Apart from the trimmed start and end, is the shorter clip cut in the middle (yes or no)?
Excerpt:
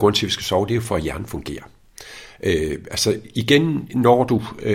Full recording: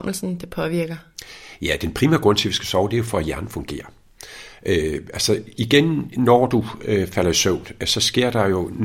no